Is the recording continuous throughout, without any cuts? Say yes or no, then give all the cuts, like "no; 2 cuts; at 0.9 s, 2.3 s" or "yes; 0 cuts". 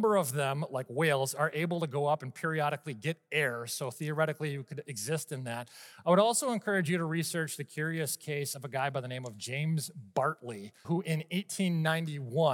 no; 1 cut; at 10.8 s